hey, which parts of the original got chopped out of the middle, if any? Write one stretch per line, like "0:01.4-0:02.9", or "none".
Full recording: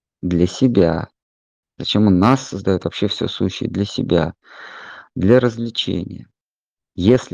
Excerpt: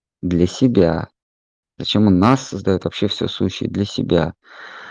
none